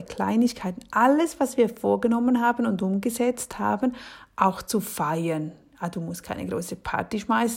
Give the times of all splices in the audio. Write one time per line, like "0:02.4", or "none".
none